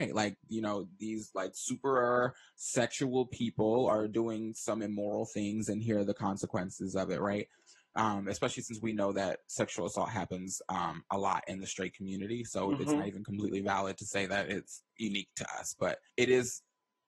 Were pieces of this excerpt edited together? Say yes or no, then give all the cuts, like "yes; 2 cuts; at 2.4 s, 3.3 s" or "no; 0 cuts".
yes; 1 cut; at 16.1 s